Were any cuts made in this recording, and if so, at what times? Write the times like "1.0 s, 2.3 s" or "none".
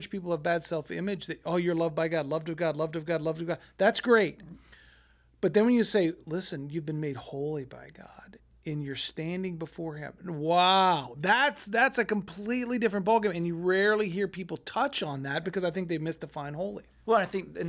none